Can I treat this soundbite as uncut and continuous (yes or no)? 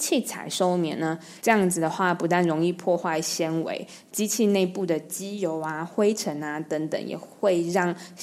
no